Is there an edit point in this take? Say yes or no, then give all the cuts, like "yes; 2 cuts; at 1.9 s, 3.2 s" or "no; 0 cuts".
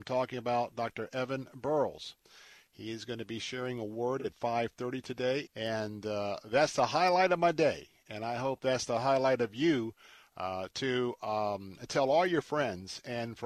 yes; 1 cut; at 5.5 s